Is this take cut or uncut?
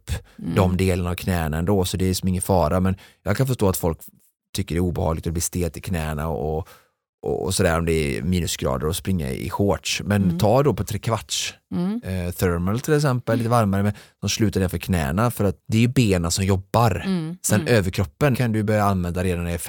cut